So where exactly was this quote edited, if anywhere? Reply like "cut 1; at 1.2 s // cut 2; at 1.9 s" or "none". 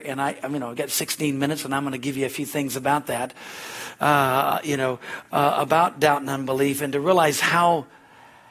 none

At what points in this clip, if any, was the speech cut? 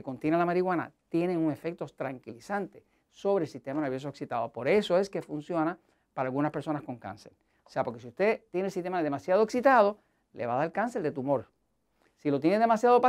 none

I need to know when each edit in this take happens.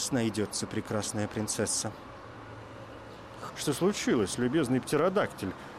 cut 1; at 3.5 s

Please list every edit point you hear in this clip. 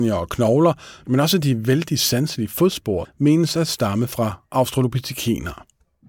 cut 1; at 3.0 s

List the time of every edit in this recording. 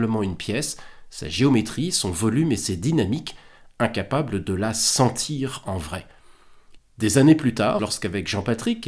cut 1; at 6.8 s // cut 2; at 7.8 s

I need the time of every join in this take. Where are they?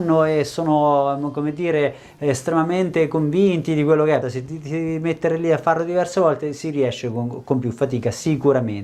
cut 1; at 4.2 s

